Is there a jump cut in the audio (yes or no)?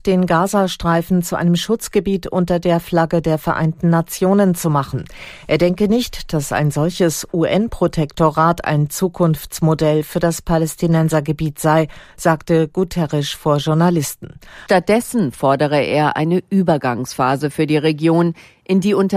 yes